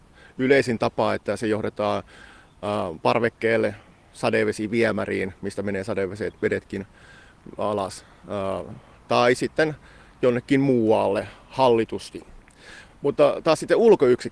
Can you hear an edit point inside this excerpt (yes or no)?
no